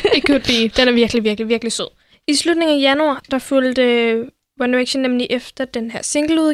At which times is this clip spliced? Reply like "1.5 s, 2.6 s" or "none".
none